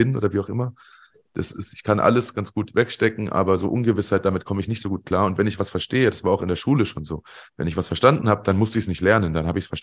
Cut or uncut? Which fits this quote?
uncut